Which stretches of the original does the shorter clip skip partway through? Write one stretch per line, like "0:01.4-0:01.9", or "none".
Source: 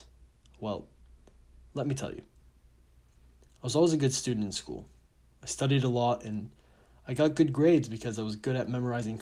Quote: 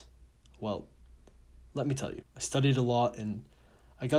0:02.2-0:05.3

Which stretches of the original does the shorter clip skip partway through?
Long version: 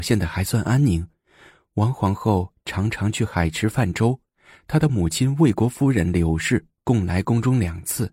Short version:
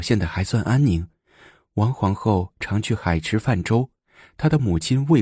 0:02.6-0:02.9

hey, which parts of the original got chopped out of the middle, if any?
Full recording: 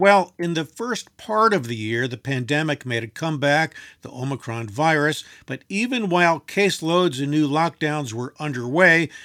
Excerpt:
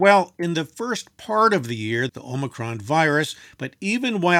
0:02.1-0:04.0

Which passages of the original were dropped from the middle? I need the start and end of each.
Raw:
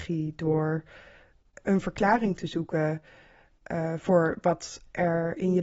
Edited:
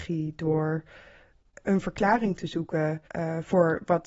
0:03.1-0:03.6

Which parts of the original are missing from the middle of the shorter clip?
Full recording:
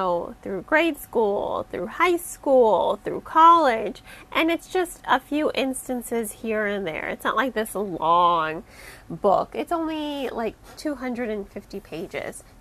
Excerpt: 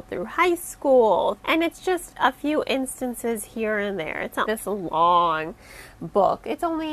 0:03.0-0:04.3
0:07.3-0:07.5

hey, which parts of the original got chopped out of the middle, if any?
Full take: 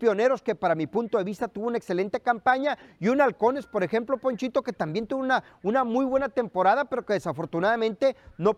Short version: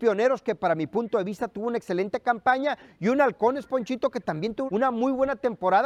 0:03.7-0:04.2
0:05.2-0:05.6

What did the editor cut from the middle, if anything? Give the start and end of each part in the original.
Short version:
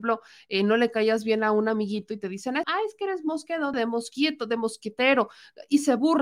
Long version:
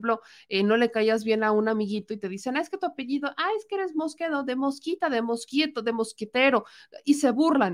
0:02.6-0:03.3
0:04.4-0:05.1

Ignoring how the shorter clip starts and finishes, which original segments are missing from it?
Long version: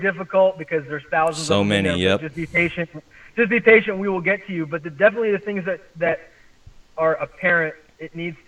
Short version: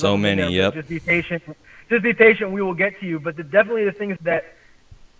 0:05.6-0:05.9

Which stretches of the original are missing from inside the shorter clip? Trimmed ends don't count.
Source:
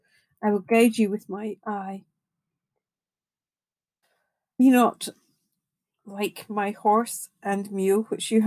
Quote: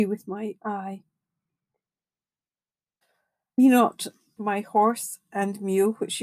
0:05.4-0:06.5

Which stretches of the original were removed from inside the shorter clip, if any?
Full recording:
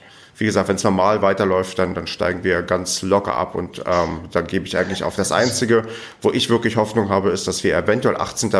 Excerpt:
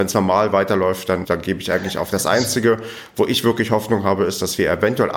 0:01.9-0:04.3

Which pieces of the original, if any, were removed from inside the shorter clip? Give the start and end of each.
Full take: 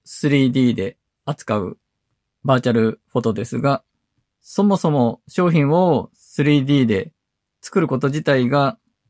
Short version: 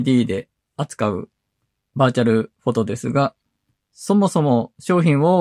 none

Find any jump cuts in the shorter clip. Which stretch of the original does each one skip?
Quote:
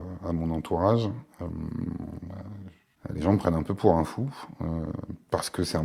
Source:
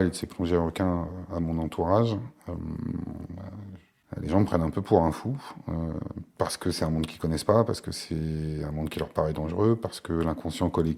none

